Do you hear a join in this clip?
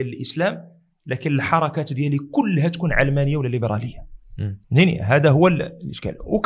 yes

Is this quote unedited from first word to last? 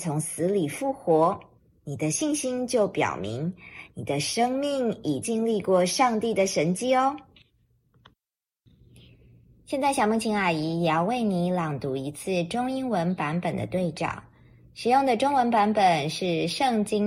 no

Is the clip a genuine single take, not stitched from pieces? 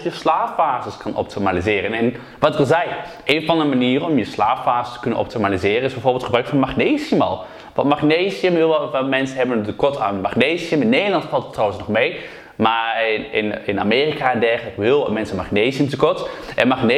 yes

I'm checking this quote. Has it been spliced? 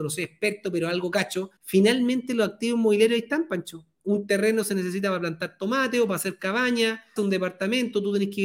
yes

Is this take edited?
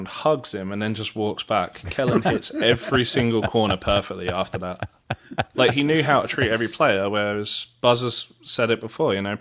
no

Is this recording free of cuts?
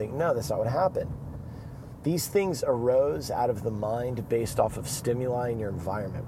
yes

